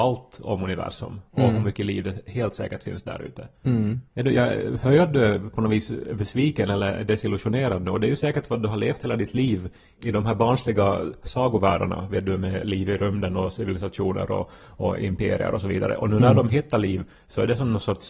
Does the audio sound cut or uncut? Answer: cut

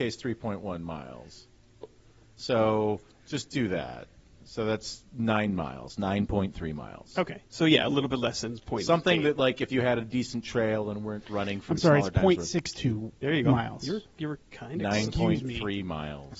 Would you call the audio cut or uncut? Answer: uncut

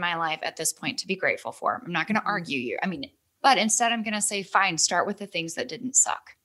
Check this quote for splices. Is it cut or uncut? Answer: cut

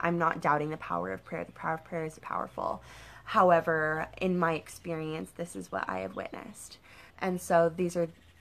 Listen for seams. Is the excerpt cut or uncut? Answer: cut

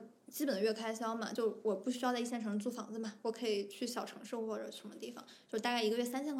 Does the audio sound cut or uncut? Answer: uncut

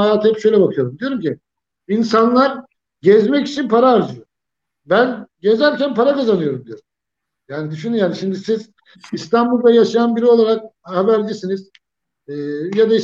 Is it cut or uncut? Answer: uncut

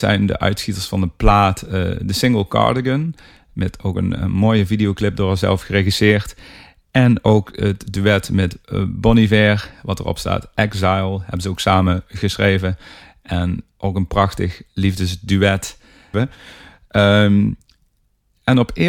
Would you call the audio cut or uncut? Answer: cut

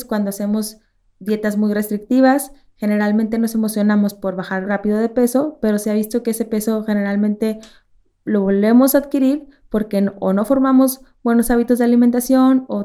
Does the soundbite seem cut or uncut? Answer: cut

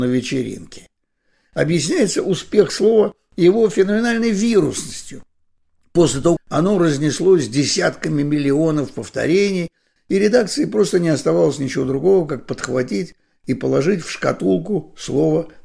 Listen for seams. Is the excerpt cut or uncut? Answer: cut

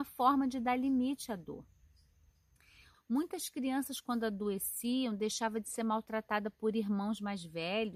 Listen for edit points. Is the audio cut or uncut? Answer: cut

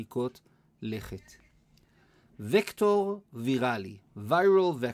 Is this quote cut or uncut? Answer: uncut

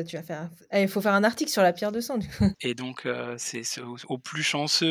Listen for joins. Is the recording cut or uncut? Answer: cut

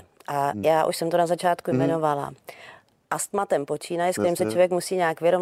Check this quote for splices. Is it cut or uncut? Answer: uncut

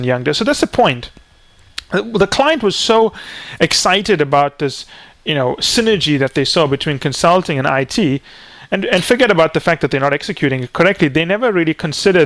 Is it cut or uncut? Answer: uncut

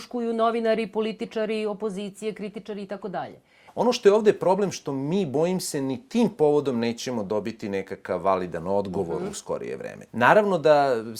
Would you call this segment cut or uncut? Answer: cut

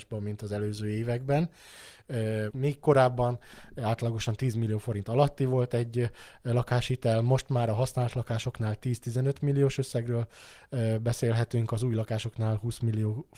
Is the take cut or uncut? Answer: cut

